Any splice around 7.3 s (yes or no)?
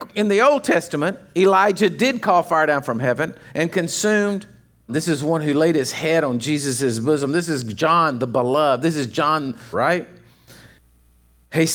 no